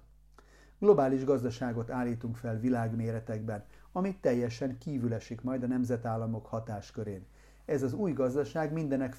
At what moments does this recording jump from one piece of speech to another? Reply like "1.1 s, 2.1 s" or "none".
none